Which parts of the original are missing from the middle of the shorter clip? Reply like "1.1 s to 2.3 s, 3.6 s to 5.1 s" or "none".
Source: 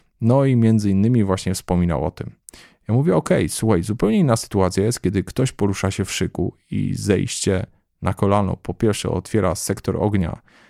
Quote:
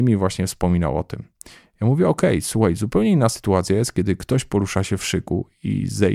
none